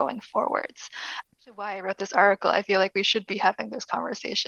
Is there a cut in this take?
yes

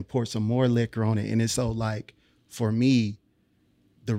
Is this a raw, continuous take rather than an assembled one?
yes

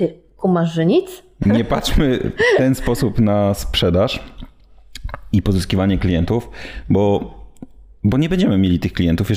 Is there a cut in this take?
yes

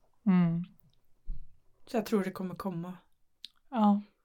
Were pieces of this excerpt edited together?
no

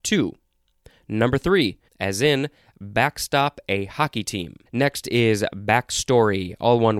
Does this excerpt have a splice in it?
yes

